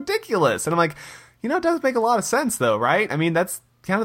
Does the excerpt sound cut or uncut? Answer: uncut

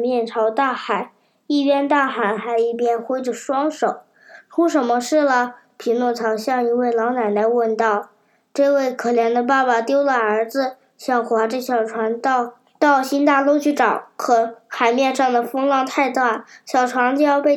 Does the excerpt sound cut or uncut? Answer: uncut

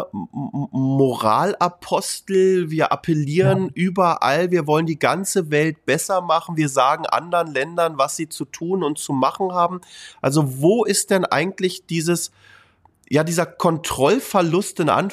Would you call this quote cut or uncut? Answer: uncut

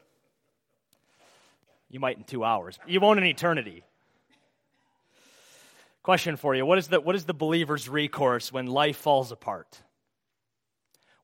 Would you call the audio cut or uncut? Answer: cut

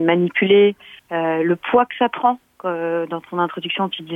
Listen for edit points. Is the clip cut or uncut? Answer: cut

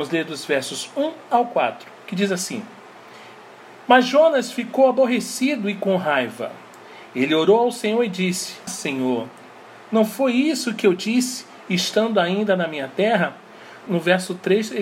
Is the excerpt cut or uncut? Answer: cut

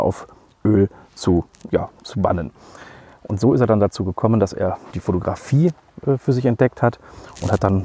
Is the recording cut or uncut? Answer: cut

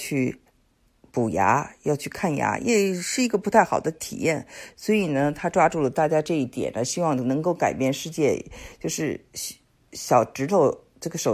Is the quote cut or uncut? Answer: uncut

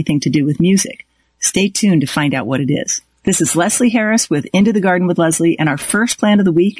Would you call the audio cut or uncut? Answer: uncut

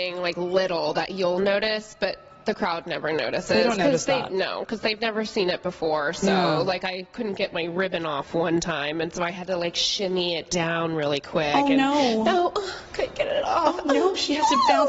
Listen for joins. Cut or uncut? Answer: uncut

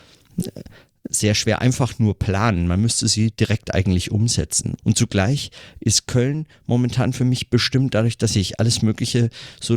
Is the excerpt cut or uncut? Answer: cut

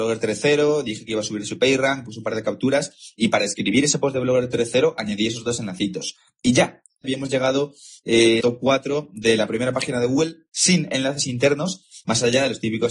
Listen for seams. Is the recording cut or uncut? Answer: cut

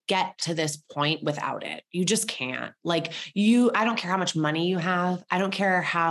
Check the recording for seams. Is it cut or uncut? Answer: uncut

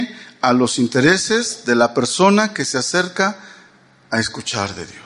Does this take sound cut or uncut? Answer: uncut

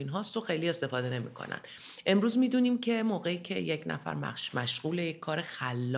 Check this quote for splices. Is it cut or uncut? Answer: uncut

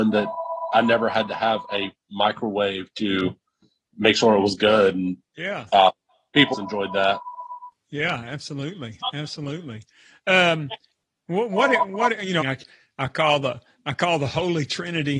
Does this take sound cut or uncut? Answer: cut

